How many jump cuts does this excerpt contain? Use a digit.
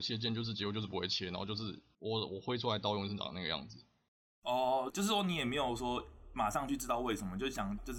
0